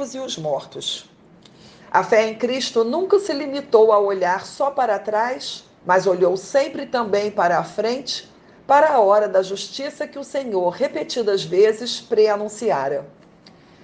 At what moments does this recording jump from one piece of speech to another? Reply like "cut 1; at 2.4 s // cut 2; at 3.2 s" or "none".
cut 1; at 1.8 s // cut 2; at 5.8 s